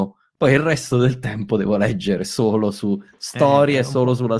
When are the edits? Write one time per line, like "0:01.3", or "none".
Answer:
none

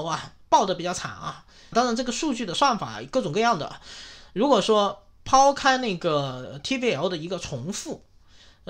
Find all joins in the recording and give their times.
0:01.7

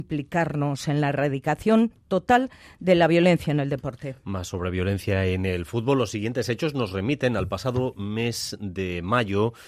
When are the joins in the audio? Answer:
none

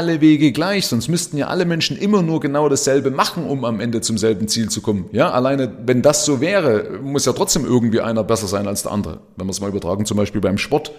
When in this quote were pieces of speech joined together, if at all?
none

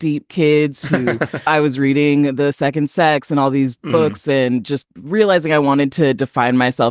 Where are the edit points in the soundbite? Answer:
0:01.5
0:04.8

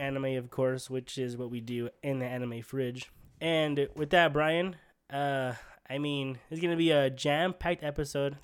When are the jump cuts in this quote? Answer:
none

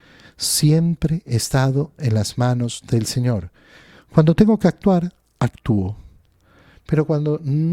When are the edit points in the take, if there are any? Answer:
none

